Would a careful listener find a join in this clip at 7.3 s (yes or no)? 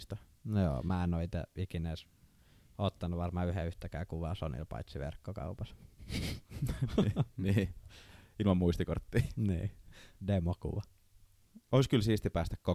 no